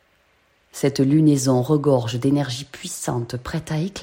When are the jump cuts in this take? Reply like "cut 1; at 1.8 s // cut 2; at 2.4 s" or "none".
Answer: none

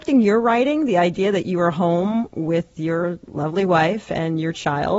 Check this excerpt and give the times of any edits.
none

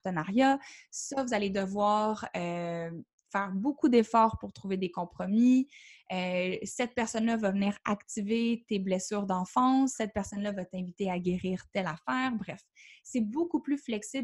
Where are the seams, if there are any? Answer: none

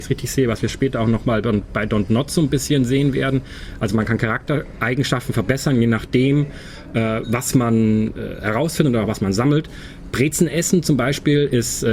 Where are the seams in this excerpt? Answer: none

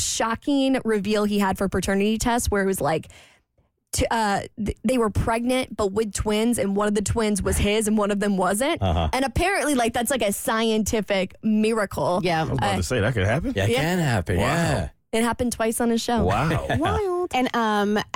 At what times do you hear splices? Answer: none

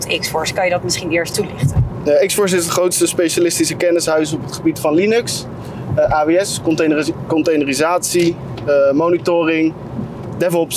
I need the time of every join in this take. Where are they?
cut 1; at 1.3 s

